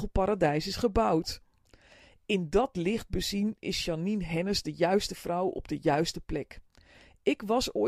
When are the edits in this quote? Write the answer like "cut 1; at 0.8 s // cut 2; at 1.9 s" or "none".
none